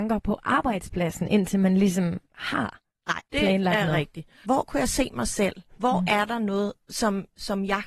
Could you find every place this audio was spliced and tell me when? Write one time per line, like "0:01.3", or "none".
0:03.2
0:04.4